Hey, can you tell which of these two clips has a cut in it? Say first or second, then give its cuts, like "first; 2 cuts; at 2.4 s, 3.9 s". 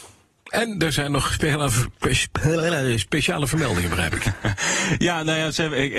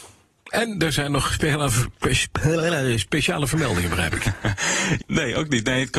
second; 1 cut; at 5.0 s